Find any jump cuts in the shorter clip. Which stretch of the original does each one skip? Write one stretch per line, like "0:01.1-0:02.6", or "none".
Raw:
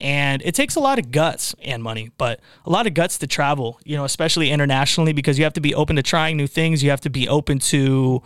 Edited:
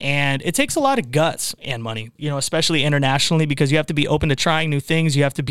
0:02.2-0:03.8